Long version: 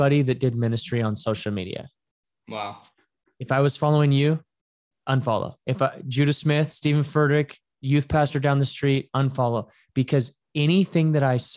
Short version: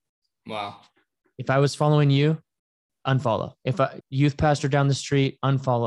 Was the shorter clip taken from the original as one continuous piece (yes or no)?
no